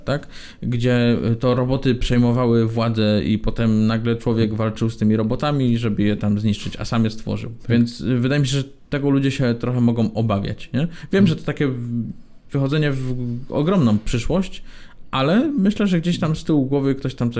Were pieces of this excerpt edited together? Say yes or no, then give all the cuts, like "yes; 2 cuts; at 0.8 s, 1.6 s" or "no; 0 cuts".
yes; 1 cut; at 7.6 s